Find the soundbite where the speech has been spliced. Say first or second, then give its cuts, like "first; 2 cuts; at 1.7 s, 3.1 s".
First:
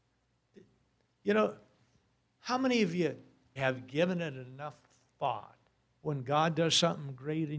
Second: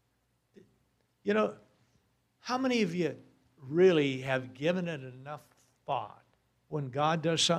first; 1 cut; at 3.6 s